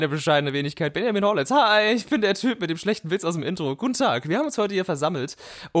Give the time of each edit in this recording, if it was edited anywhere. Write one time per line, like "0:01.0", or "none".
none